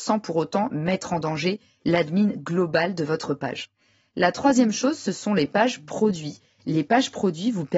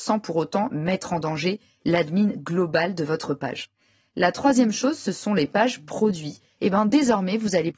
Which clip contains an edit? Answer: second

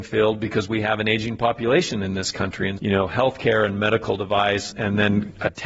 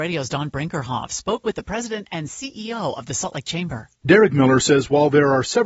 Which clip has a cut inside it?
first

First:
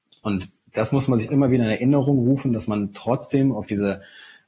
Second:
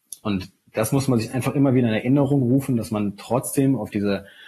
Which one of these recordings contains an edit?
first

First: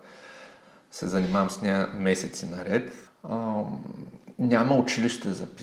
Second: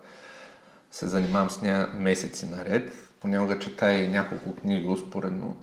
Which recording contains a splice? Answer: first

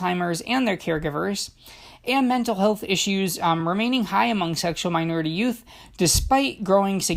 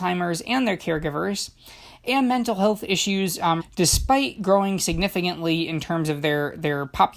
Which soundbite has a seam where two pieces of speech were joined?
second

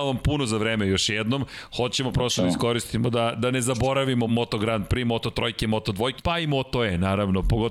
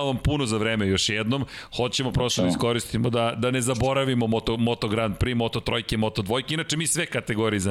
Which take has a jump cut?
first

